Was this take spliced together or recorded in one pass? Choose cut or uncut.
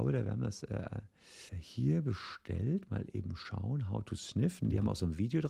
cut